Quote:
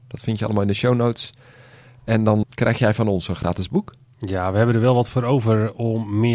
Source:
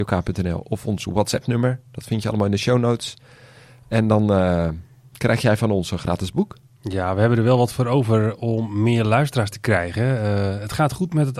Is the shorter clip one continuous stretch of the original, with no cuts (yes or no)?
no